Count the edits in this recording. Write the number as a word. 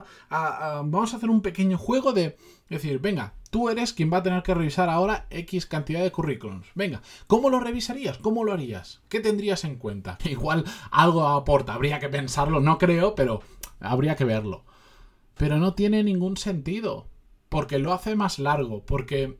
one